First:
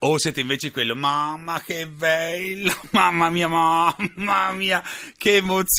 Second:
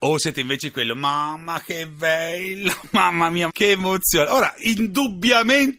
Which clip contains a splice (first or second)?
second